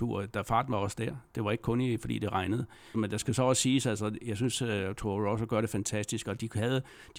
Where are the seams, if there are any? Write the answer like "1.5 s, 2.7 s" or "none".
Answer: 2.9 s